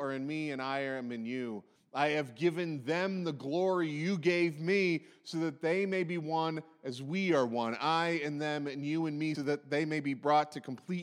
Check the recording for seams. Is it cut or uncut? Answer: cut